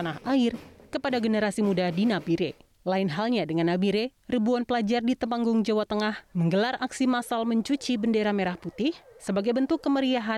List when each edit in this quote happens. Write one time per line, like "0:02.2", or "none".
0:02.7